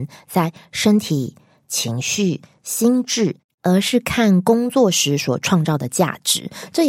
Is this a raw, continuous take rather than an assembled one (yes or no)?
no